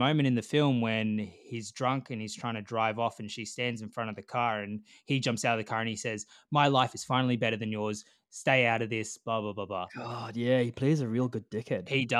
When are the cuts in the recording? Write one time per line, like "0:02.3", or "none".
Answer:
none